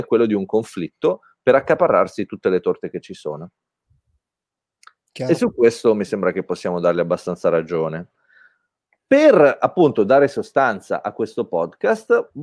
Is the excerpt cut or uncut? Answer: uncut